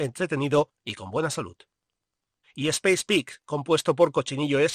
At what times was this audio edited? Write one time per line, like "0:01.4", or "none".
0:02.4